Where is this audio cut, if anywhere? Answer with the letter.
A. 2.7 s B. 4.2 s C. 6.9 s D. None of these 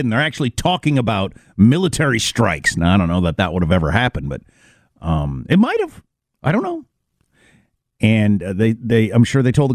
D